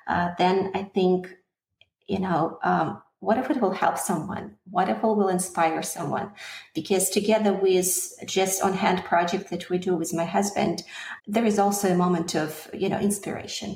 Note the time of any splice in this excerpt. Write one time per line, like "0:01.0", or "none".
0:11.2